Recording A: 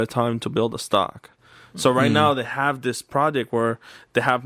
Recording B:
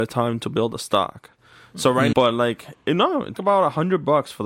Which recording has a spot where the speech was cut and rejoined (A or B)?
B